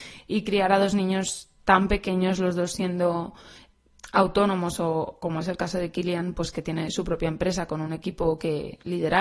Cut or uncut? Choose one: uncut